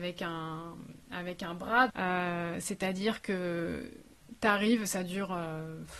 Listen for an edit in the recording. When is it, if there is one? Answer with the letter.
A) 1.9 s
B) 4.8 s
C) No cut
A